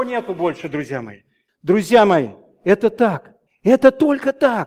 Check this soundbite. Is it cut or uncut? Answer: cut